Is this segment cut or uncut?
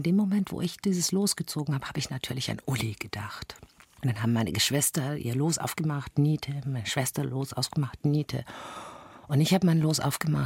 uncut